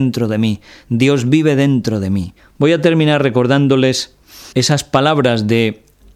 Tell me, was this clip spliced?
yes; 2 cuts; at 2.4 s, 4.5 s

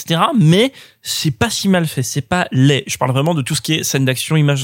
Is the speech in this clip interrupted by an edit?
no; 0 cuts

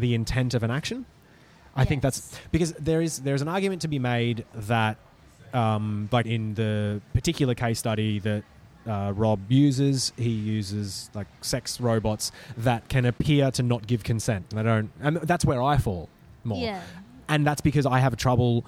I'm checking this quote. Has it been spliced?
yes; 2 cuts; at 6.2 s, 14.5 s

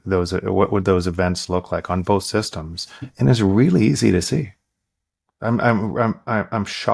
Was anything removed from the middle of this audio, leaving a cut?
no; 0 cuts

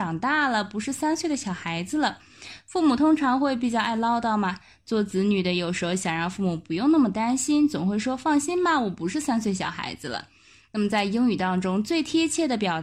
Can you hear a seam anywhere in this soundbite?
no; 0 cuts

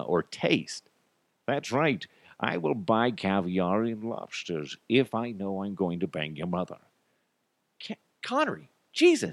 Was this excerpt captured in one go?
no; 1 cut; at 1.4 s

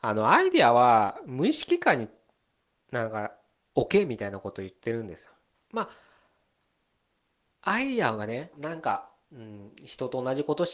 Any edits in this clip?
yes; 2 cuts; at 5.5 s, 8.5 s

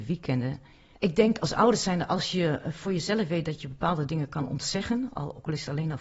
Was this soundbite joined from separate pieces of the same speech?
yes; 1 cut; at 0.9 s

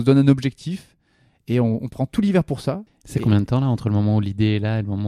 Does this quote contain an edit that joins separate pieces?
yes; 1 cut; at 2.9 s

